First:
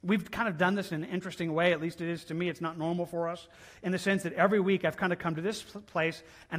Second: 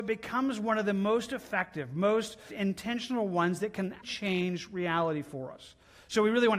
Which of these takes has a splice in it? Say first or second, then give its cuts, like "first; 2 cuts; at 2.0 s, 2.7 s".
second; 2 cuts; at 2.5 s, 4.0 s